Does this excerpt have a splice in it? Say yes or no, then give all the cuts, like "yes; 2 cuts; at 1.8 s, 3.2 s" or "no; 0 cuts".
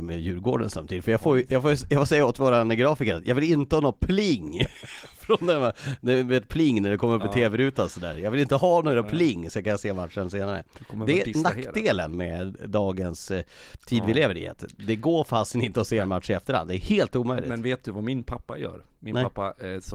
no; 0 cuts